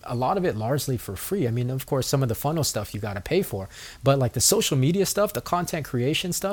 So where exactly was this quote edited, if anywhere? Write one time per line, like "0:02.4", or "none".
none

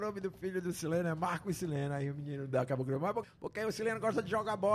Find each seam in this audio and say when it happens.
0:03.2

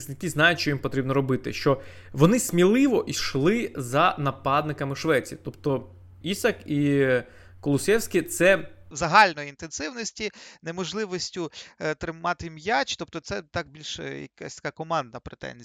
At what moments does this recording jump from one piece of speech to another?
0:06.2
0:08.9

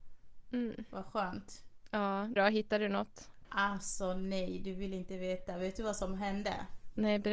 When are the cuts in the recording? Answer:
0:02.4
0:03.4

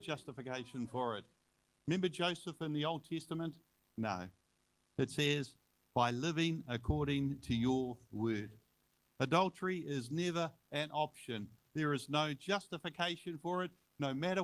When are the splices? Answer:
0:03.9
0:09.1
0:11.7

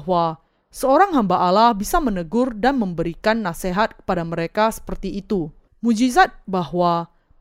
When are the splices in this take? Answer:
0:05.7

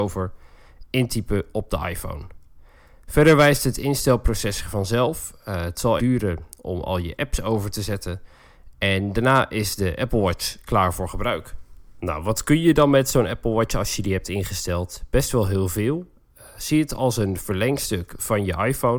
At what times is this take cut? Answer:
0:06.0

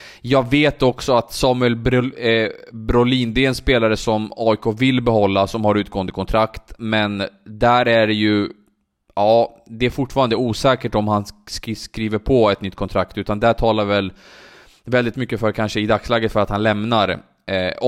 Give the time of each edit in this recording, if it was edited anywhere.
none

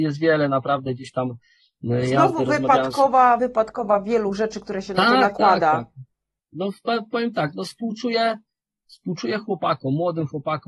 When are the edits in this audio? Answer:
none

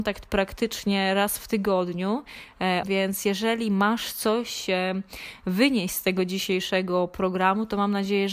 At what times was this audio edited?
0:02.8

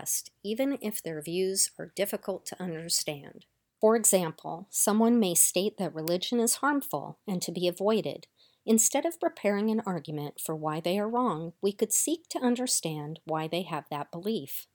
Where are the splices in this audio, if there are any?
none

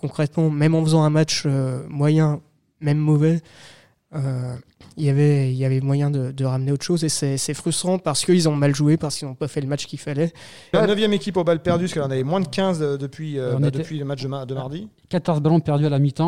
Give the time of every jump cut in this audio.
0:10.7

